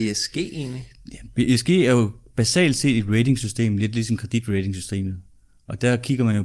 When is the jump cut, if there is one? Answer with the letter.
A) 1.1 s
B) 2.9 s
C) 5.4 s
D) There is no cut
D